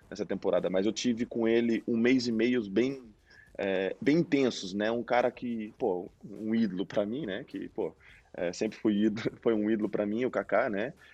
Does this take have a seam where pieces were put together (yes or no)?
no